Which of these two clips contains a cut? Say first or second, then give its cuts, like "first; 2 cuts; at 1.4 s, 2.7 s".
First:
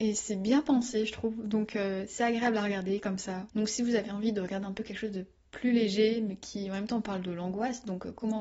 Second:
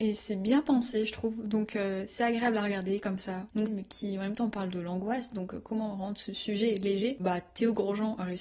second; 2 cuts; at 3.7 s, 7.2 s